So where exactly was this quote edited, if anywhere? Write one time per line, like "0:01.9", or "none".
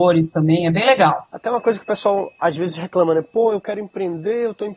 0:01.3